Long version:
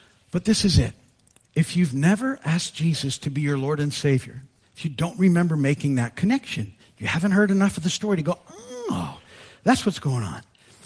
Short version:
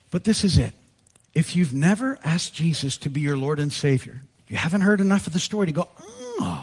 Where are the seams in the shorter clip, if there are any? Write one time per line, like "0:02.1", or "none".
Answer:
0:04.4